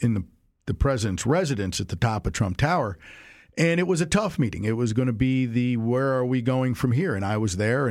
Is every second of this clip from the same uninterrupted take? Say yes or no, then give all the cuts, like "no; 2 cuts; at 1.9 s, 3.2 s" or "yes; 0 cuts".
yes; 0 cuts